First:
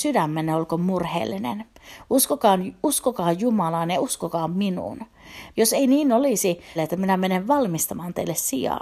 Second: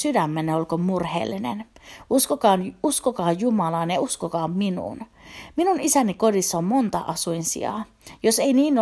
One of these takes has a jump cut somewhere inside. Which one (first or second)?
first